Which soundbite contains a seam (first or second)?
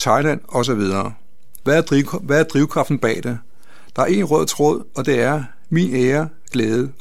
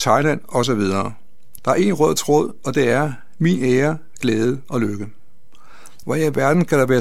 second